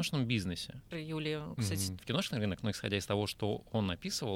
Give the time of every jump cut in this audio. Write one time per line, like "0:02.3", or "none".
0:00.9
0:02.0

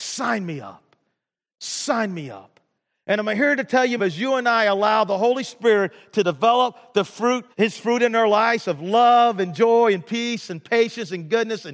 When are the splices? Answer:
0:04.0
0:07.5

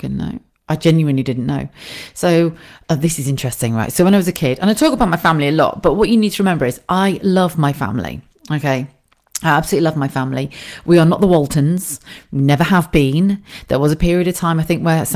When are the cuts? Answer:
none

